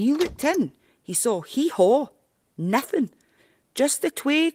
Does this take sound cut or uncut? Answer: uncut